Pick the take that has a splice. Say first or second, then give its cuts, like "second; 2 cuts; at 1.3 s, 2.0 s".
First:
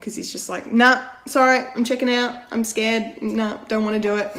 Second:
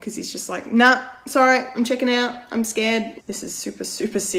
second; 1 cut; at 3.2 s